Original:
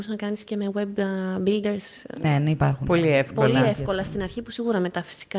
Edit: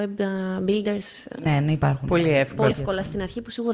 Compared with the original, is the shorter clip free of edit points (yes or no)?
no